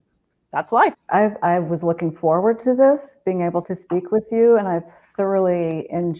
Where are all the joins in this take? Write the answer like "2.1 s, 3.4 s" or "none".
0.9 s, 3.6 s